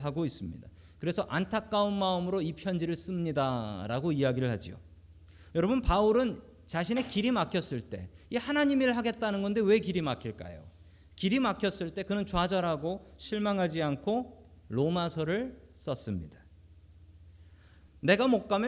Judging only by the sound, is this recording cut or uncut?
cut